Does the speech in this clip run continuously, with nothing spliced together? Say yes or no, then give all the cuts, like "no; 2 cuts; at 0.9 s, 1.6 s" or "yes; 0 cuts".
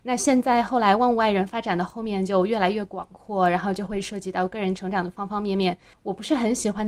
no; 1 cut; at 5.9 s